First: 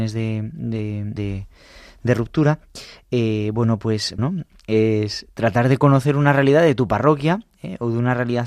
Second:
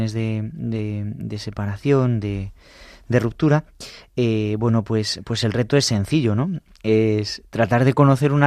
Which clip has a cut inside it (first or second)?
first